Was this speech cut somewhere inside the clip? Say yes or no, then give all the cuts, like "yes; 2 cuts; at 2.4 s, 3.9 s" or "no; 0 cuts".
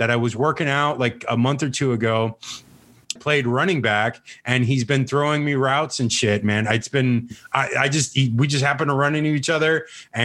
yes; 1 cut; at 3.2 s